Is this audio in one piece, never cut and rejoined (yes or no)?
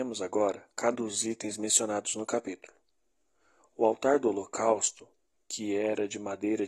no